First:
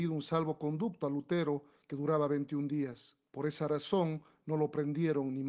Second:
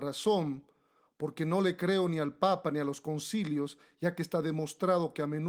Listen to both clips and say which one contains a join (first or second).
first